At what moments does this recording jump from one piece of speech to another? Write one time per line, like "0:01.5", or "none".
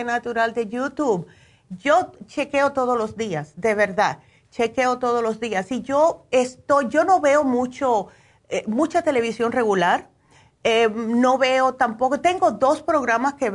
none